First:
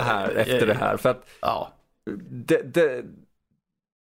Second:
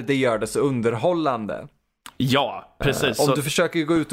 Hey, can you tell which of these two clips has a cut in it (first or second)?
first